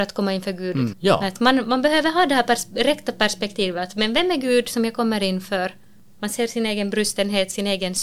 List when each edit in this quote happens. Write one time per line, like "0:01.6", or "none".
0:00.9